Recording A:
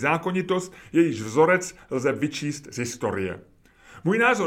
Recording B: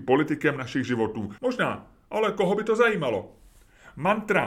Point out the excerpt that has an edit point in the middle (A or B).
B